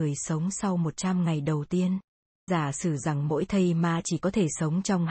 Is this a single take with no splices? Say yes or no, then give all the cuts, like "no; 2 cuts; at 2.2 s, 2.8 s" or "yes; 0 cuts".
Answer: no; 1 cut; at 2.5 s